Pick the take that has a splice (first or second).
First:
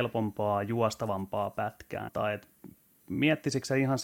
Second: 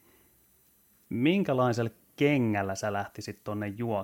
first